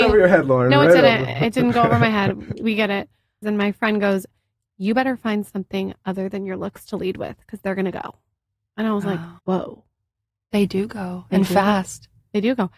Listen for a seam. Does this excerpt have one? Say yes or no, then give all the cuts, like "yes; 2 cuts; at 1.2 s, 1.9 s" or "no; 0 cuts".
yes; 2 cuts; at 3.4 s, 9.4 s